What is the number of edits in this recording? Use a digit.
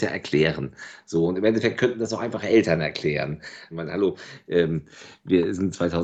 1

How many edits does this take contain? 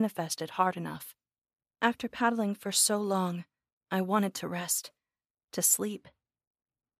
1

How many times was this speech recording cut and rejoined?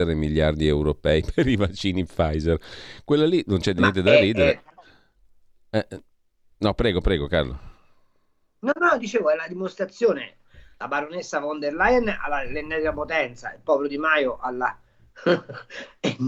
0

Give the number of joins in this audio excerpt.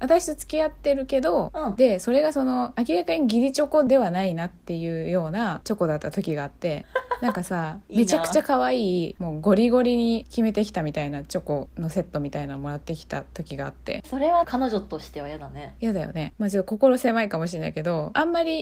2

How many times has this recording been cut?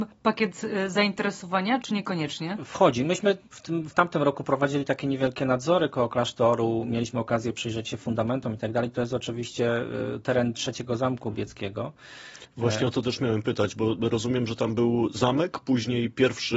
1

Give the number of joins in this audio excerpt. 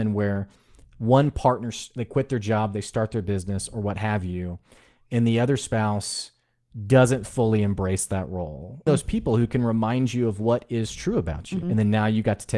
2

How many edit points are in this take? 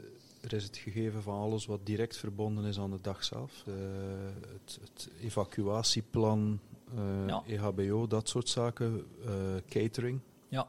1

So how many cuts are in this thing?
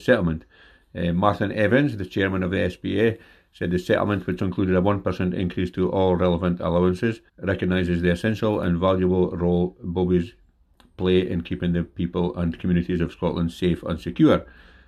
2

